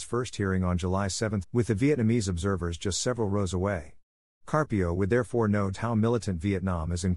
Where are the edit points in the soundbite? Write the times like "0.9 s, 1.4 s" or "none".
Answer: 1.4 s, 5.7 s

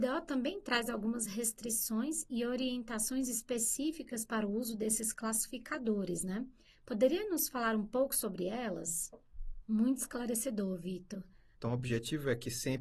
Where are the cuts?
9.6 s, 11.5 s

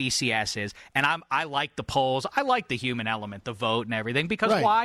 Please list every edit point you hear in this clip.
none

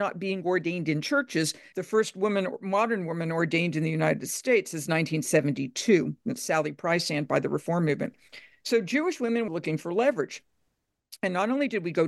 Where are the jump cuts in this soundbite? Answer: 1.7 s, 9.5 s

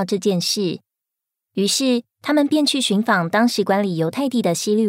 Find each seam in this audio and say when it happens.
none

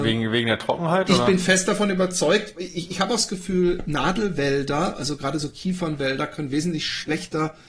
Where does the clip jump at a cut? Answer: none

